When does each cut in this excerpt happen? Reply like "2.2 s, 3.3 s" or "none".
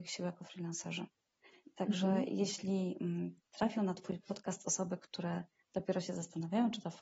none